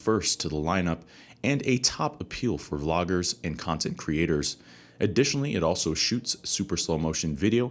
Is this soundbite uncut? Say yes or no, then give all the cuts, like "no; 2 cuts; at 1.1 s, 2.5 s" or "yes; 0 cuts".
yes; 0 cuts